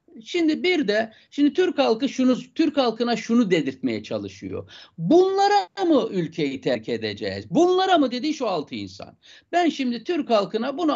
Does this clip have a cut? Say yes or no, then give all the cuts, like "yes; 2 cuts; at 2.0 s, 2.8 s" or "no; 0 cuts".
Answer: no; 0 cuts